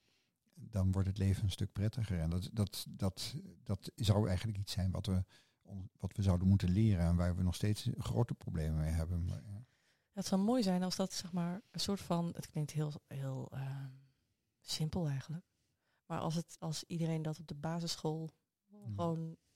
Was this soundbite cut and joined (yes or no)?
no